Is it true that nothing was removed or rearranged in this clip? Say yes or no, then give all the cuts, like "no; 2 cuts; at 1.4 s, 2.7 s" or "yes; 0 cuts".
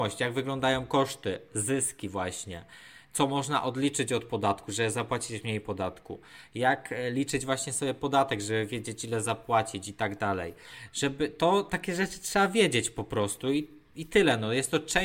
yes; 0 cuts